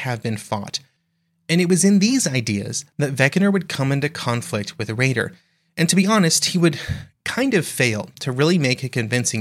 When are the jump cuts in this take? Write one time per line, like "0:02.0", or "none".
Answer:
none